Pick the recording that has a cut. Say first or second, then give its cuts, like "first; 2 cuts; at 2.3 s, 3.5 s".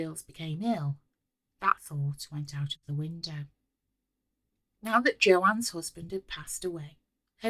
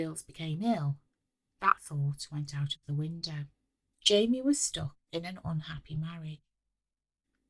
second; 1 cut; at 3.9 s